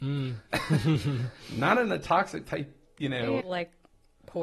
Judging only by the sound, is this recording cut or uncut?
cut